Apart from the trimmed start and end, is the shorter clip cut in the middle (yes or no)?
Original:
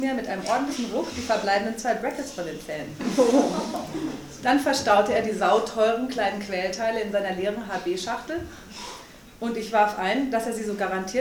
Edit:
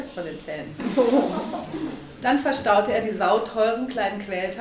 no